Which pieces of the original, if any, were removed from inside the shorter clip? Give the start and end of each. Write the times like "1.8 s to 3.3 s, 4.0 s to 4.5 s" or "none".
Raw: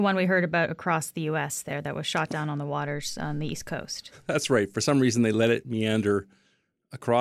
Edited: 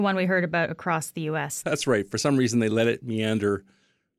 1.6 s to 4.2 s